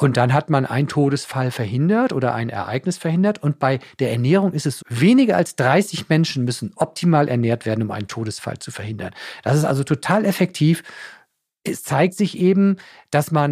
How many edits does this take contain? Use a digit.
1